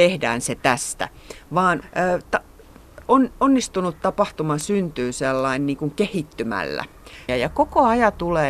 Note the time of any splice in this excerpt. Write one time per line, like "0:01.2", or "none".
0:01.8
0:07.3